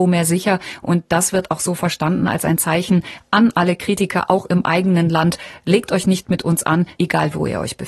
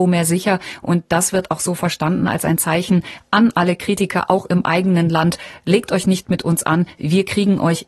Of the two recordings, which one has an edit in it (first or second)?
first